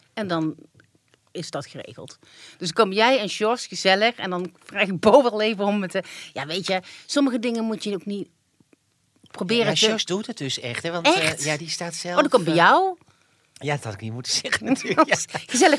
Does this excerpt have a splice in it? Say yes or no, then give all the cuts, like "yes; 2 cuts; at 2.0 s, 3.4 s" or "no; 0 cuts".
no; 0 cuts